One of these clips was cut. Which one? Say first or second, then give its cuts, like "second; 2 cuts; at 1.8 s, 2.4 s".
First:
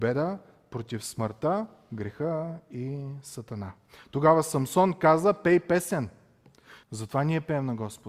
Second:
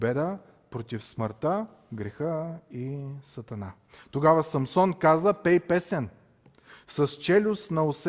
first; 1 cut; at 6.8 s